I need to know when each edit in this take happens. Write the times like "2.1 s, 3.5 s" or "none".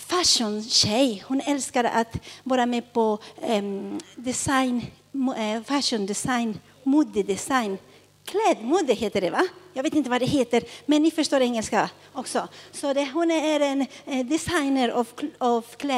none